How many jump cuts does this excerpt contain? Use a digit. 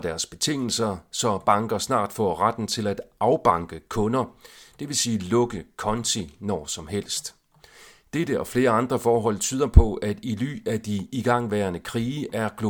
0